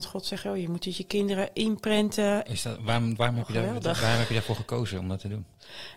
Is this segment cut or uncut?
cut